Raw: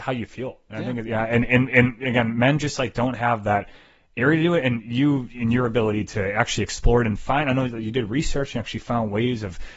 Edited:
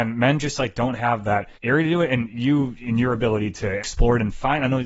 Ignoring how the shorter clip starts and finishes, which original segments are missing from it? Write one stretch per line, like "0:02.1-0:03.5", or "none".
0:03.7-0:04.1
0:06.3-0:06.6

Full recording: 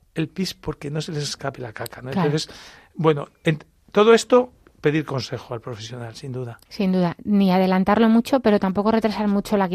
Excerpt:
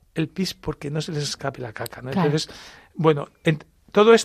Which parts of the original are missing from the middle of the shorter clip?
none

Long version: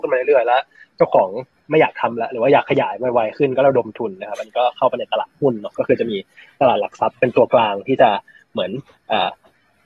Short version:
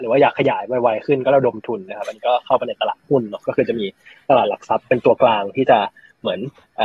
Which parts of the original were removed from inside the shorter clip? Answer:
none

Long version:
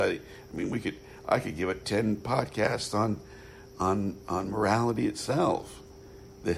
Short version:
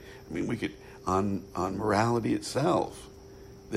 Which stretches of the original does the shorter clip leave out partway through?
0:01.2-0:03.7

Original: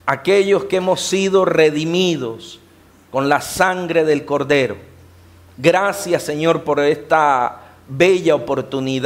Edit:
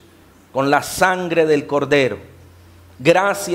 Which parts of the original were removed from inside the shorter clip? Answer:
none

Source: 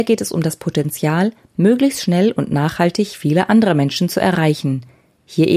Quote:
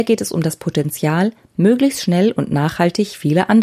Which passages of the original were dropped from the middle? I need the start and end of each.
none

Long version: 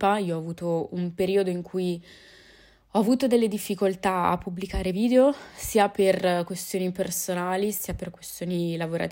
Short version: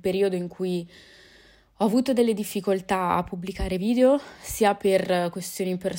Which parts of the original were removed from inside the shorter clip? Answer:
none

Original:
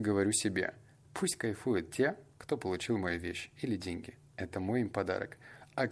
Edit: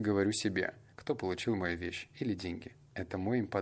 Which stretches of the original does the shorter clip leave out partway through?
0:00.9-0:02.3

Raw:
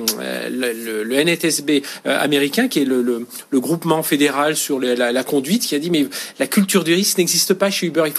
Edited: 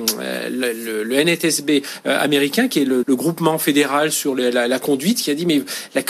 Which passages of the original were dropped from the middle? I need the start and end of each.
0:03.0-0:03.5

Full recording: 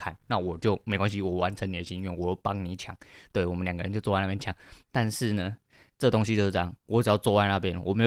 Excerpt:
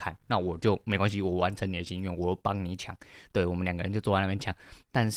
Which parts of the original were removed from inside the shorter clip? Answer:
none

